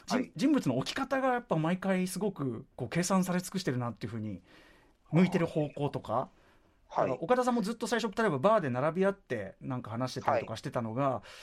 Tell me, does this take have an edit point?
no; 0 cuts

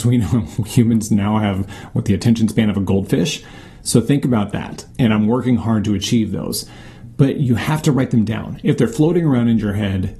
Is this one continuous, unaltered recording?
no; 1 cut; at 4.9 s

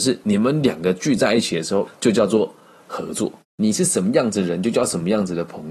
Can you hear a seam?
yes; 2 cuts; at 1.9 s, 3.5 s

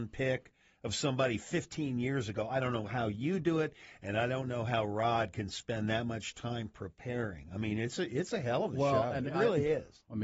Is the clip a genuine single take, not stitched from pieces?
yes; 0 cuts

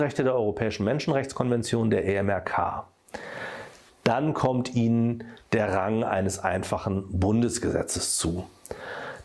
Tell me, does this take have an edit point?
yes; 1 cut; at 3.9 s

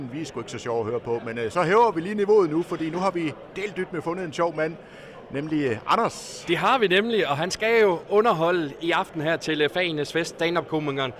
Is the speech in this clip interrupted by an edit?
no; 0 cuts

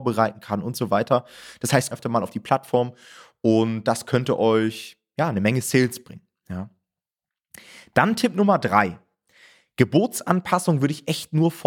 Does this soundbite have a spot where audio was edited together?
yes; 1 cut; at 1.9 s

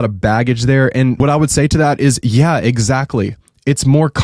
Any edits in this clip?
no; 0 cuts

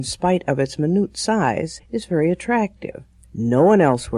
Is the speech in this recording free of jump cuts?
no; 1 cut; at 3.2 s

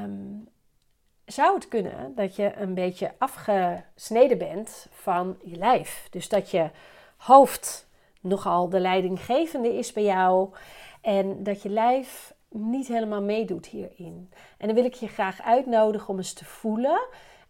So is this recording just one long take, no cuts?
yes; 0 cuts

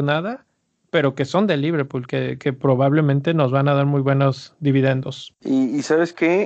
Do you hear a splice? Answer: no; 0 cuts

